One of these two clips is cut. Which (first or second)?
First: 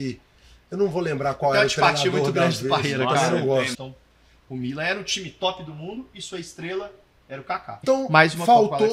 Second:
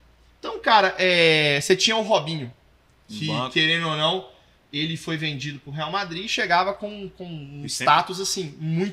first